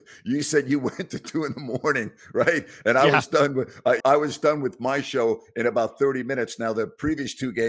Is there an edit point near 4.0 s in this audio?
yes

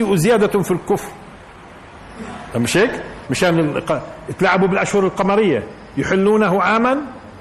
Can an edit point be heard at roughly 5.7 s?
no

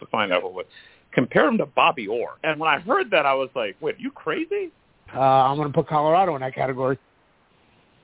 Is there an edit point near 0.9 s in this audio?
no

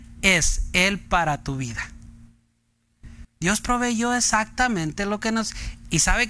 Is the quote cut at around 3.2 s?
yes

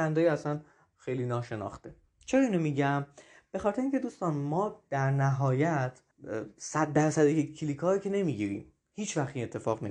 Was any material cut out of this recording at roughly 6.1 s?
yes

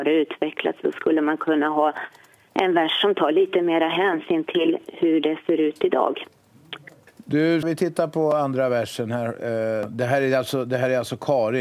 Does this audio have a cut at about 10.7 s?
no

